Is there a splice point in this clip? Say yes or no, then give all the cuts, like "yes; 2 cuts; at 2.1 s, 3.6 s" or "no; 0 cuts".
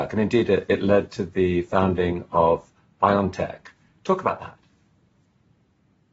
no; 0 cuts